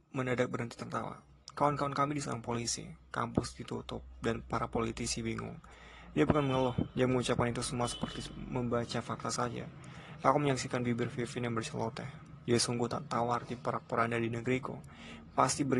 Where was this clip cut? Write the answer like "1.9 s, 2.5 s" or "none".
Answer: none